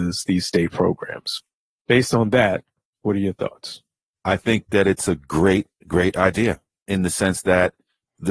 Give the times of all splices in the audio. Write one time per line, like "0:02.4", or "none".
none